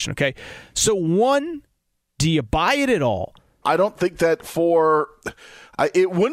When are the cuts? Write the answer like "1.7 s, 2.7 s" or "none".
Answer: 3.6 s